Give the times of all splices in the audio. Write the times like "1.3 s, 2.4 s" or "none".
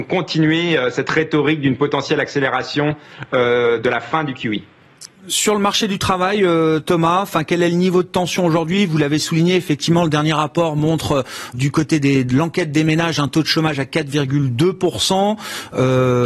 11.5 s